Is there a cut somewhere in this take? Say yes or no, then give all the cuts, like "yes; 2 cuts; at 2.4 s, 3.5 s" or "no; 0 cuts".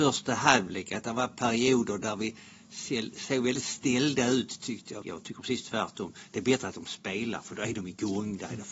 yes; 1 cut; at 5.0 s